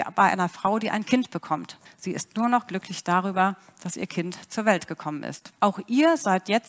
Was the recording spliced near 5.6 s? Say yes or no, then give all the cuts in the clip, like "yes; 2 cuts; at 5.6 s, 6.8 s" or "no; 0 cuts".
yes; 2 cuts; at 1.9 s, 5.6 s